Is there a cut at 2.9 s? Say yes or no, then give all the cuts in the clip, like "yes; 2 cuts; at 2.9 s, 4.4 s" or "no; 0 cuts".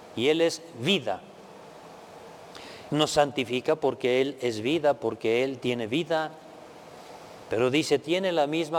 yes; 2 cuts; at 2.9 s, 7.5 s